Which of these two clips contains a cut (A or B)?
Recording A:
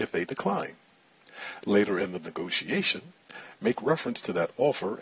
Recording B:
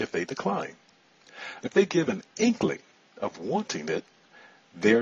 B